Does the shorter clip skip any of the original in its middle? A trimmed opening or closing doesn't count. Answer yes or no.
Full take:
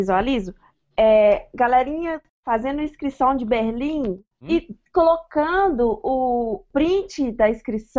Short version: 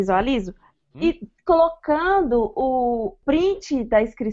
yes